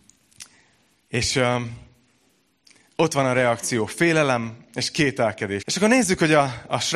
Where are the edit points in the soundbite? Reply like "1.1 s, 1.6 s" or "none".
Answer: 5.6 s